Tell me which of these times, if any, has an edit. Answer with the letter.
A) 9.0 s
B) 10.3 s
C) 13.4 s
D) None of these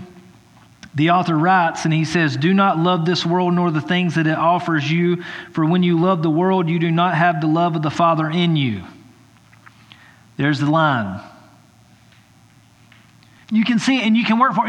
C